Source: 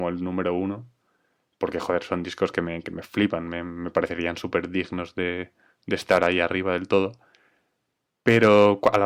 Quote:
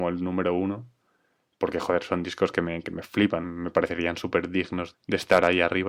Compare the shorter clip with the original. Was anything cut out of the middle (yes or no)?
yes